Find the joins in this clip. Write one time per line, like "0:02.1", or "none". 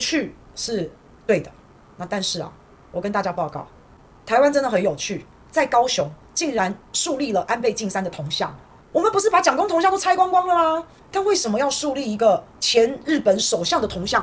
0:11.0
0:12.5